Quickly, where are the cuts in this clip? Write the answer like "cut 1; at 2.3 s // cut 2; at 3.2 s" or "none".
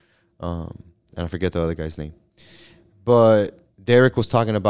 none